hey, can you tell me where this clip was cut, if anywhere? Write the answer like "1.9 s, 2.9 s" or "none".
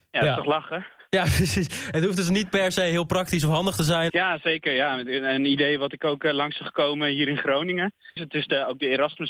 4.1 s, 8.2 s